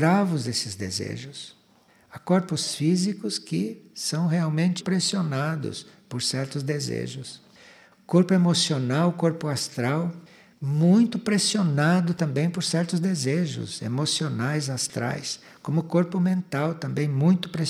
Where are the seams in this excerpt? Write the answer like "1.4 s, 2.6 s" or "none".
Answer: 4.8 s